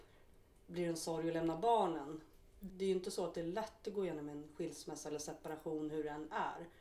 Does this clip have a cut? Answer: yes; 1 cut; at 2.7 s

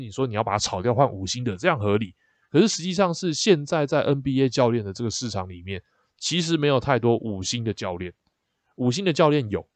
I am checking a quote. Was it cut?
no; 0 cuts

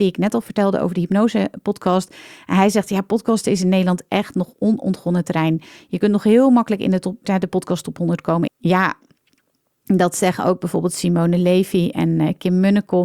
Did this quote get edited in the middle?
yes; 2 cuts; at 7.2 s, 8.5 s

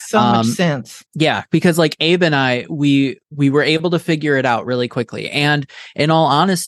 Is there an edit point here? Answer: no; 0 cuts

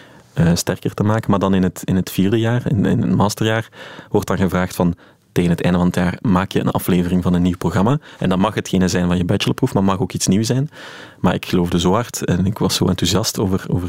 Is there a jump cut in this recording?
no; 0 cuts

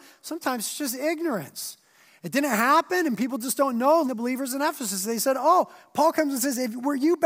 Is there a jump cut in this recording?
yes; 1 cut; at 4.0 s

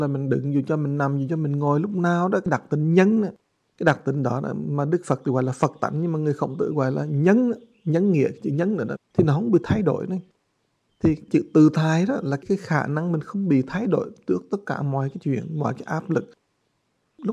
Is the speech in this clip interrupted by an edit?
yes; 1 cut; at 9.0 s

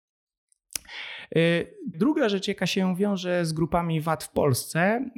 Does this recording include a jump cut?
yes; 1 cut; at 1.9 s

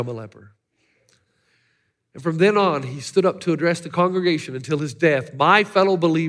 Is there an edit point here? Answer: no; 0 cuts

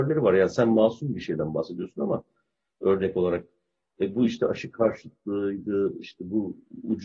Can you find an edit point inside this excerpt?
no; 0 cuts

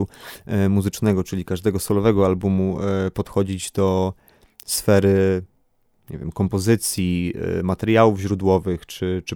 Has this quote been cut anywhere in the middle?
no; 0 cuts

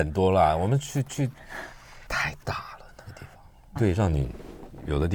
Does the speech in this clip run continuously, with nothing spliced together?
no; 2 cuts; at 2.1 s, 3.8 s

